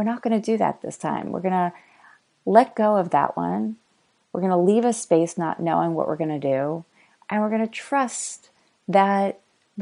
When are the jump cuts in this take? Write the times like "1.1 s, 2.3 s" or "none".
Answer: none